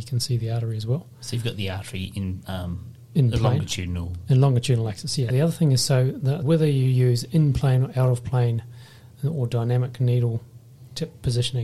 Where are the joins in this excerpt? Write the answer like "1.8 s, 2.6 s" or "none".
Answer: 5.3 s, 6.4 s